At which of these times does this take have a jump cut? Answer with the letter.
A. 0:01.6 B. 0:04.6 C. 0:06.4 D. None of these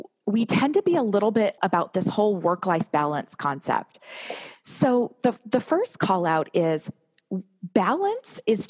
A